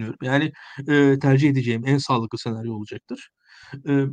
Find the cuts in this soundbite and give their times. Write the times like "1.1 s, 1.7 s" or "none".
1.2 s